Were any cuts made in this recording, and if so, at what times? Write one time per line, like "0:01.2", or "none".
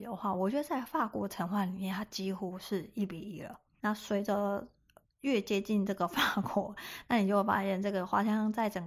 0:03.8